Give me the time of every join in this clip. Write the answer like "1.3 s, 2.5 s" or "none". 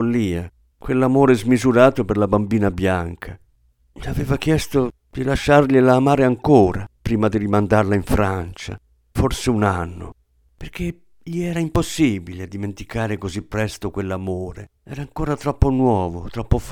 9.2 s, 14.8 s